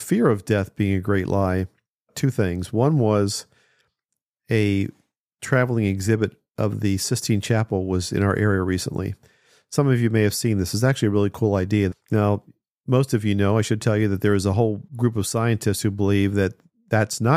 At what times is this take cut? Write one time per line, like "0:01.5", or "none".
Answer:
0:11.9
0:14.9